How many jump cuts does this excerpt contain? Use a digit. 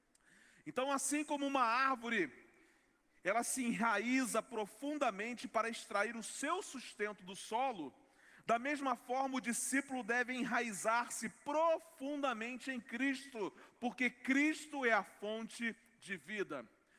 1